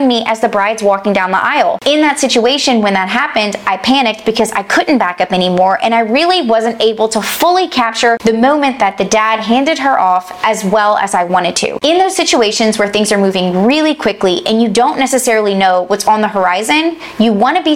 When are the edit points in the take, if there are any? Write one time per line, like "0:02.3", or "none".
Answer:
none

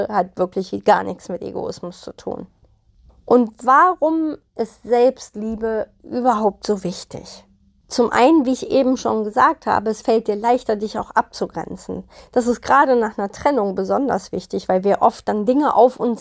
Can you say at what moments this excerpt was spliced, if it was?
none

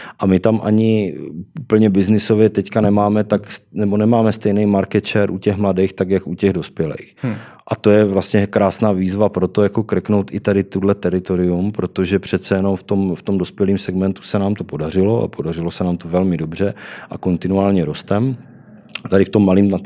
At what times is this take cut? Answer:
none

